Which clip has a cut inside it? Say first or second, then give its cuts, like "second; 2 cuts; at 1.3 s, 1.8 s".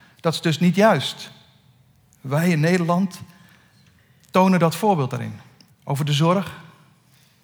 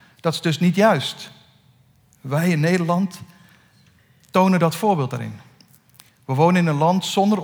first; 1 cut; at 5.7 s